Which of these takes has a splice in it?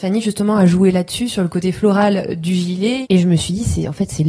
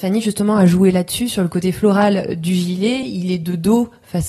first; 1 cut; at 3.0 s

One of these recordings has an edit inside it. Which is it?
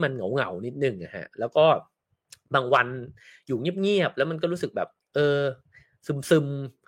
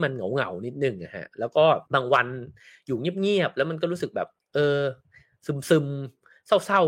second; 1 cut; at 1.9 s

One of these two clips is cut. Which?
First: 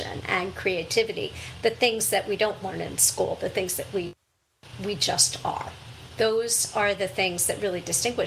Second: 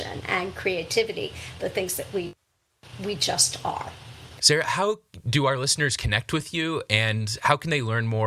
second; 2 cuts; at 1.6 s, 4.4 s

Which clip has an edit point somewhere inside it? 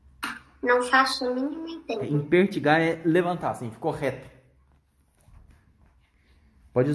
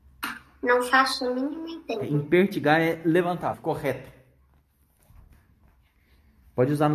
second; 1 cut; at 3.5 s

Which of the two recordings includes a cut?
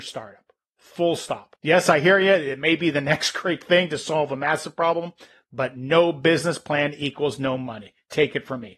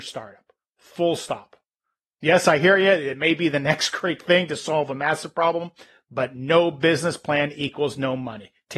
first; 1 cut; at 1.5 s

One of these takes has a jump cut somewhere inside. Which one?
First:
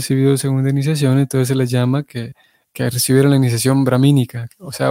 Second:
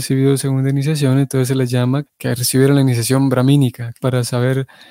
second; 2 cuts; at 2.0 s, 4.0 s

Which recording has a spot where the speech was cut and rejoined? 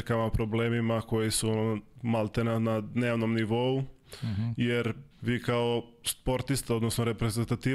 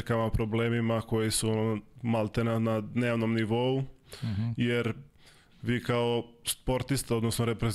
first; 1 cut; at 5.1 s

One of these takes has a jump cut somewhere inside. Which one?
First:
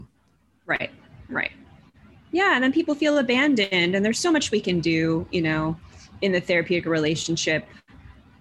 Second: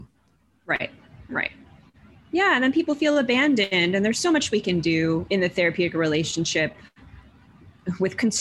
second; 1 cut; at 5.3 s

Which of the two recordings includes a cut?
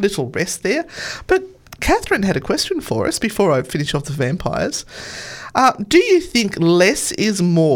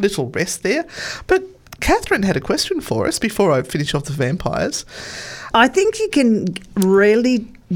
second; 1 cut; at 5.5 s

